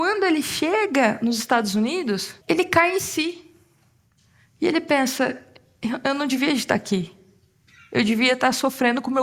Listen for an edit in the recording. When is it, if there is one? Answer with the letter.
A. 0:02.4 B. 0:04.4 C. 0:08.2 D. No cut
A